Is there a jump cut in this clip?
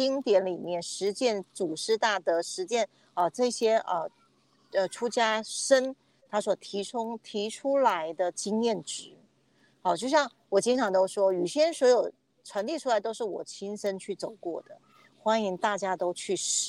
no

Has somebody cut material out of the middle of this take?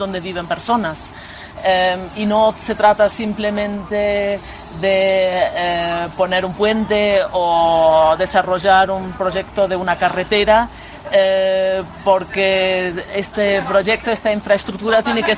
no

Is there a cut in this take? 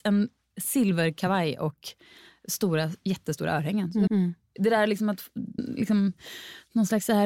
yes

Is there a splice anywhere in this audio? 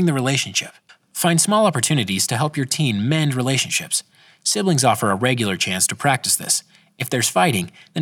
no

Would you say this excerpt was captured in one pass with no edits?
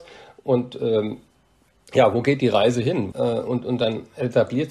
no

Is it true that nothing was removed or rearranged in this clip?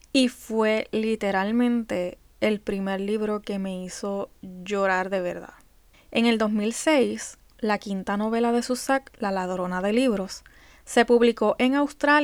no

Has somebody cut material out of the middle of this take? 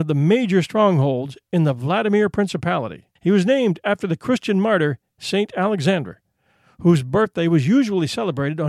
yes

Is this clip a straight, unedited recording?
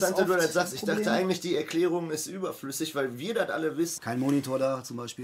no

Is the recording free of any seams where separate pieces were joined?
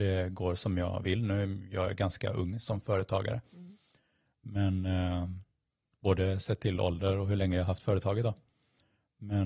yes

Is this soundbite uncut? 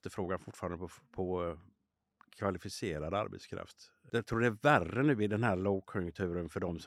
yes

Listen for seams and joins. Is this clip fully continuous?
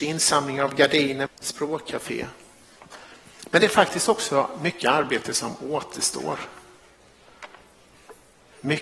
no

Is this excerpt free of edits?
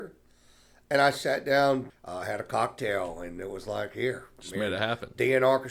no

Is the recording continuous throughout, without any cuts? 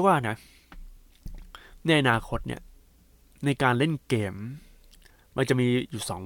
yes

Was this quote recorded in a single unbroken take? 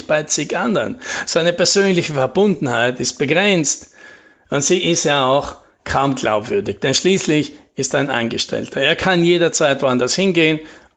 yes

